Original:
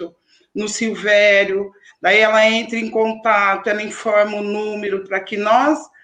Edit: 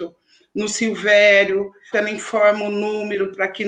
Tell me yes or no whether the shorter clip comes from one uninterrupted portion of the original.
no